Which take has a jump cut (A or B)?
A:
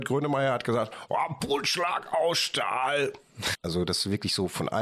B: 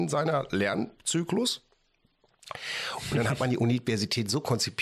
A